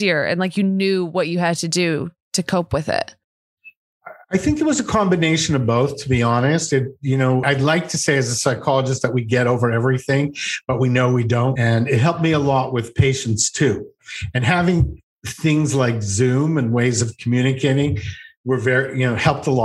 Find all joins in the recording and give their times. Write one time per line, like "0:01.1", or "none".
0:07.4
0:11.6

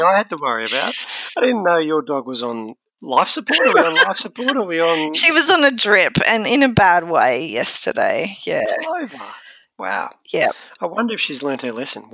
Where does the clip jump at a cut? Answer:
none

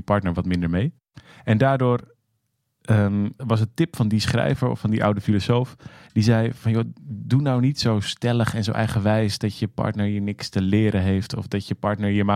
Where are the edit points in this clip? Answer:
0:03.4

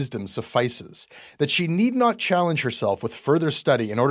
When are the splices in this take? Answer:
none

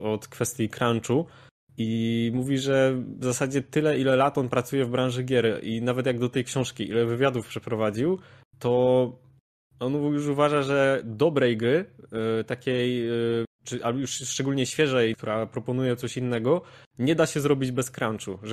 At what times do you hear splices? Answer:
0:15.1

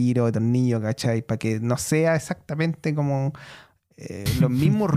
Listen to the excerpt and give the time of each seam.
none

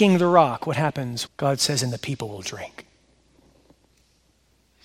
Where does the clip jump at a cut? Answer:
0:01.3

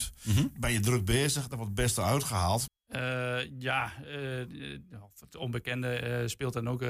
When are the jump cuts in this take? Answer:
0:02.7

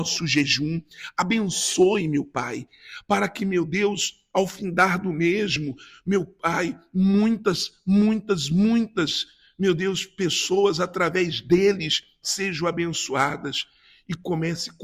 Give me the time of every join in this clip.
none

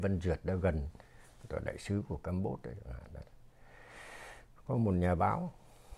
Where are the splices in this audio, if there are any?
none

